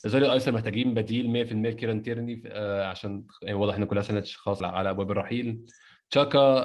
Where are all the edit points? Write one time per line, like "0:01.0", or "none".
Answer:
0:04.6